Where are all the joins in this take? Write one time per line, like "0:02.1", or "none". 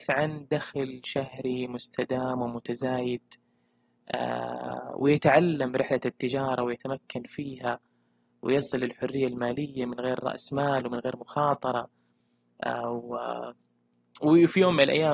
none

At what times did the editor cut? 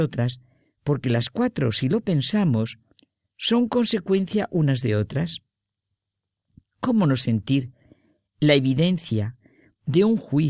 none

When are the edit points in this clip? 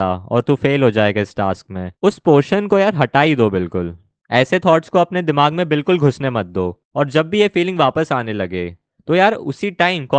0:01.9

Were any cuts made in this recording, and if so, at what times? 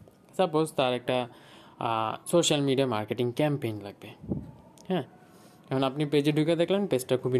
0:02.2

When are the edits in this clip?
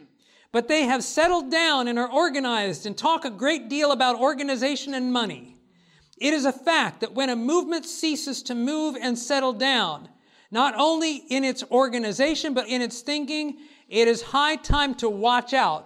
0:12.6

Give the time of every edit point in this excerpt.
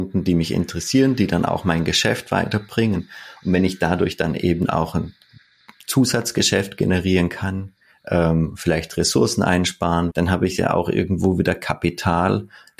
0:10.1

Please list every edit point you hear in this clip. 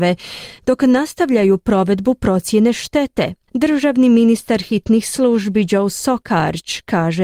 0:03.5

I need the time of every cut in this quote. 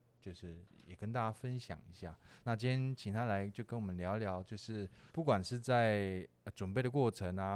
0:02.4
0:05.1

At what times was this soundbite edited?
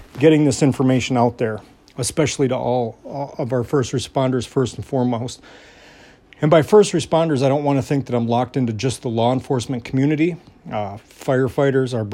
none

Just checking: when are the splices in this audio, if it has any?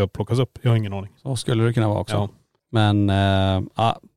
none

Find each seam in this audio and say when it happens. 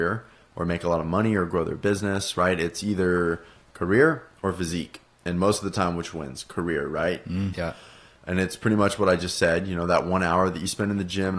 0:07.5

